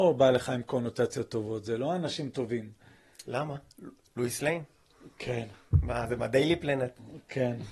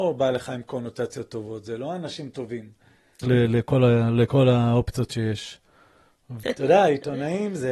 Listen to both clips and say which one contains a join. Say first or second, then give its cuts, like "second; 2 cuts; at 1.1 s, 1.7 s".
second; 2 cuts; at 3.2 s, 6.4 s